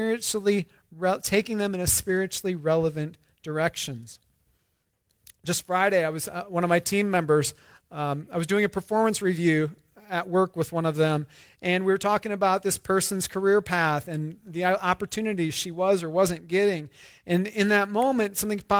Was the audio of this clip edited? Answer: no; 0 cuts

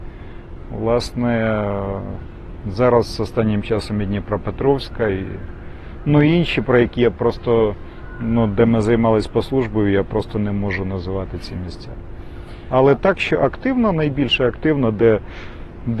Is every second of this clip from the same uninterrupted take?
yes; 0 cuts

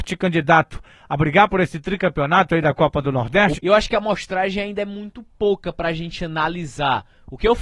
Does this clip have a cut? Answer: yes; 1 cut; at 3.5 s

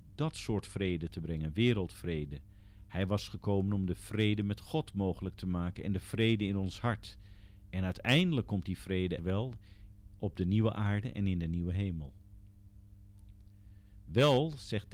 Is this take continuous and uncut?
no; 1 cut; at 9.2 s

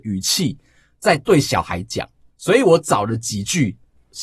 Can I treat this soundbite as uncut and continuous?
yes; 0 cuts

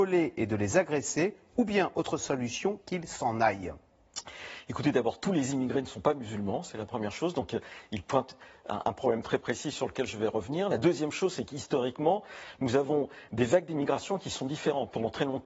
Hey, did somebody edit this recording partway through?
no; 0 cuts

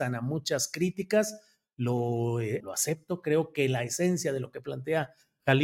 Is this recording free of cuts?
no; 1 cut; at 2.6 s

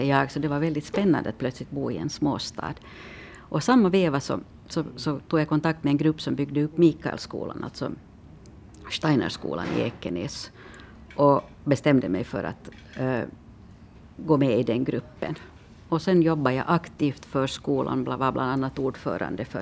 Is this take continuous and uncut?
yes; 0 cuts

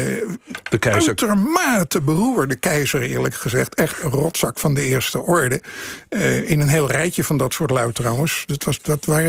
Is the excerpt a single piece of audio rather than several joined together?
yes; 0 cuts

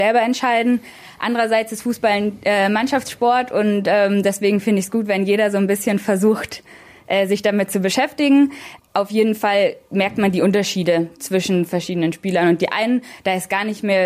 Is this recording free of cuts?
yes; 0 cuts

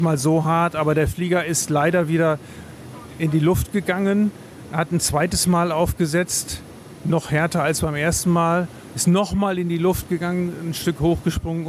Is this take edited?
no; 0 cuts

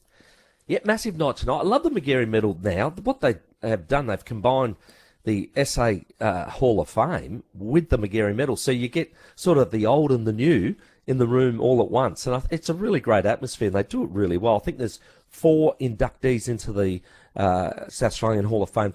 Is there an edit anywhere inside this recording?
no; 0 cuts

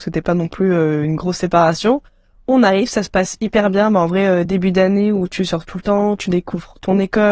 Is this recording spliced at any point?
no; 0 cuts

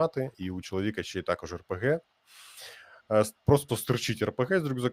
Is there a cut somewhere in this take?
yes; 1 cut; at 3.7 s

